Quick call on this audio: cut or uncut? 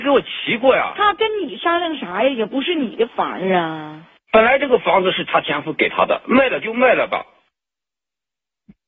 cut